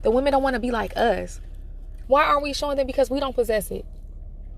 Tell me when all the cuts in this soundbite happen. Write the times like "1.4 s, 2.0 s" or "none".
2.0 s

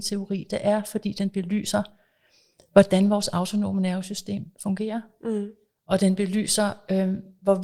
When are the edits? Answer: none

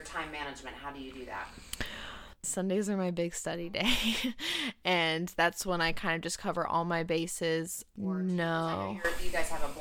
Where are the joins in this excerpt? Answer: 2.4 s, 8.0 s

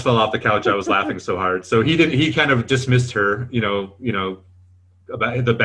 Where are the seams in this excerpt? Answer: none

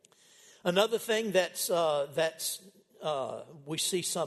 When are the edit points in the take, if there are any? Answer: none

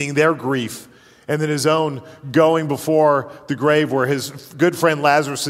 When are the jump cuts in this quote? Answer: none

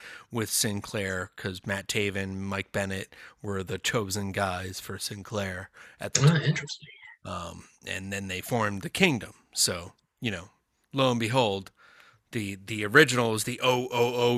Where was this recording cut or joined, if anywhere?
none

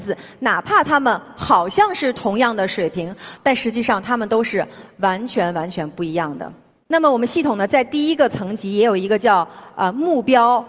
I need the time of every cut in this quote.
3.4 s

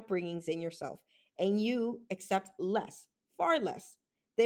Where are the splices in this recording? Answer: none

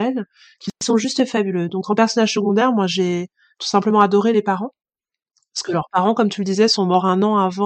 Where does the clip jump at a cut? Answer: none

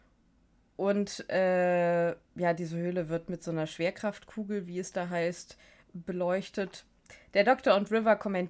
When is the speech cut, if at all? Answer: none

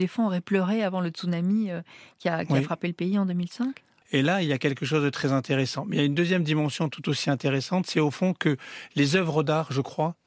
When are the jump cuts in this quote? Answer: 4.0 s

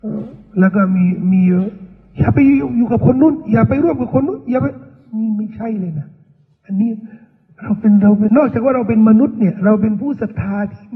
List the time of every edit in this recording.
8.3 s

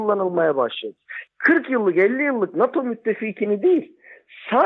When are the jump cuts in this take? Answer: 1.3 s

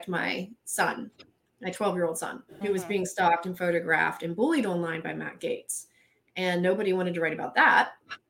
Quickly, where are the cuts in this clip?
none

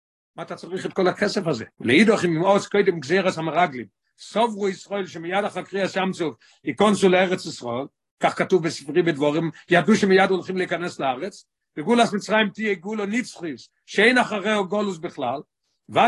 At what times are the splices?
1.7 s

